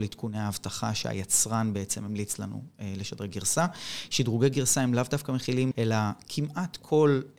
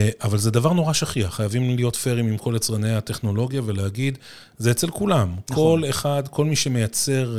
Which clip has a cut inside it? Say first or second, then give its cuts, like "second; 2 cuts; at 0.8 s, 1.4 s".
first; 1 cut; at 5.7 s